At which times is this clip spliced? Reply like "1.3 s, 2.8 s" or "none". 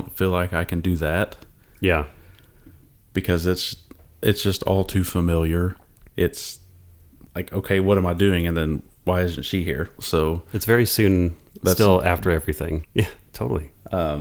10.0 s, 12.8 s